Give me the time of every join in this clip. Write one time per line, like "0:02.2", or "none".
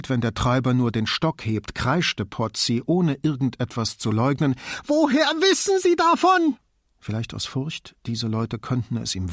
0:06.9